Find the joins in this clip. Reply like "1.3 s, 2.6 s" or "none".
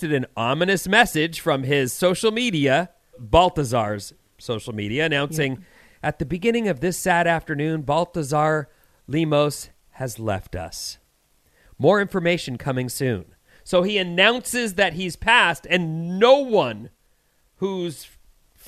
3.1 s